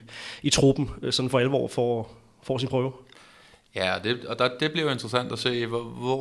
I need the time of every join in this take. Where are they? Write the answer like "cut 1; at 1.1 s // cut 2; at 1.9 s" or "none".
none